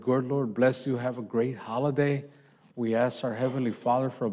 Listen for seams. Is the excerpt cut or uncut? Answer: uncut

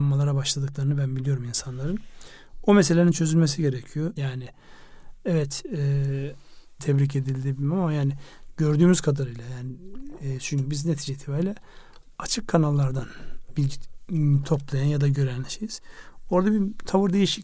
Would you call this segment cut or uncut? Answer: cut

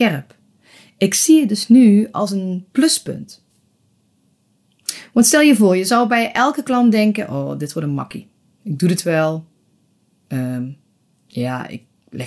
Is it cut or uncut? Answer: uncut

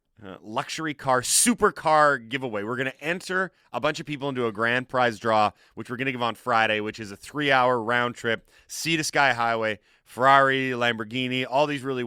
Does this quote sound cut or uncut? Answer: uncut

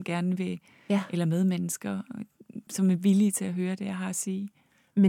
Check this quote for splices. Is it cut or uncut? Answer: cut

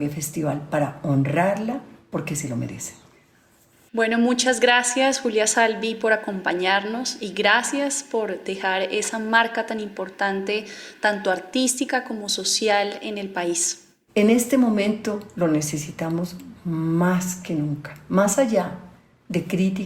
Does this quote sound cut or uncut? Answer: cut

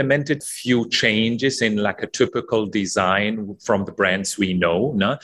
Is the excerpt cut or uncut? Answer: uncut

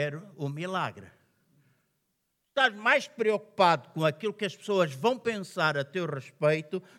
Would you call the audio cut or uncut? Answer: uncut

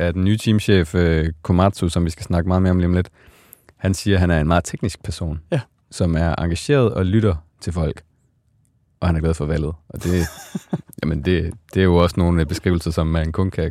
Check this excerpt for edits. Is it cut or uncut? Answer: uncut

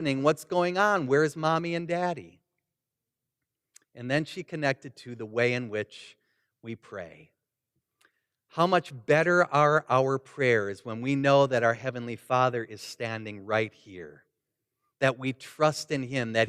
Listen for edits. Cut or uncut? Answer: uncut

